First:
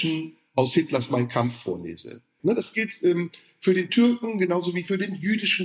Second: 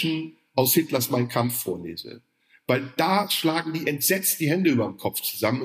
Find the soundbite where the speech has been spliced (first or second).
first